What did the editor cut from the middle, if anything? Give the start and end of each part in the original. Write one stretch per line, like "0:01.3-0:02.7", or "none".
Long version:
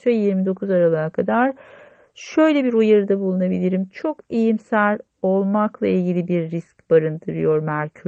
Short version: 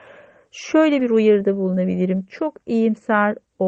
none